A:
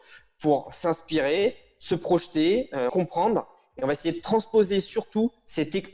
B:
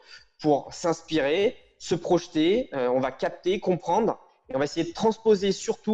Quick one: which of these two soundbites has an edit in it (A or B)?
A